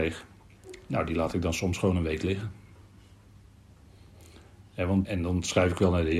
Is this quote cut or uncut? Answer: cut